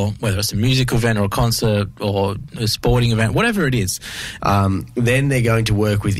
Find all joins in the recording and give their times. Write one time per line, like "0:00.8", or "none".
0:04.4